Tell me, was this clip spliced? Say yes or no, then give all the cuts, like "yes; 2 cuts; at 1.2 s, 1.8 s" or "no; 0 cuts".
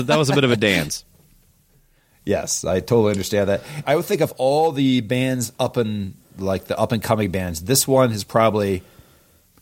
yes; 1 cut; at 3.8 s